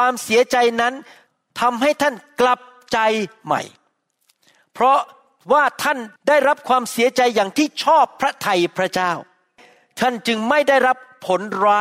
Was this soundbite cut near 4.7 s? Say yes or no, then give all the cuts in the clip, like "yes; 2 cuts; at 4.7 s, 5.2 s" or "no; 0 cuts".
no; 1 cut; at 6.2 s